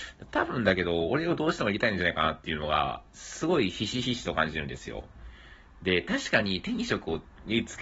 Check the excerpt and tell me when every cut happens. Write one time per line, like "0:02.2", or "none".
none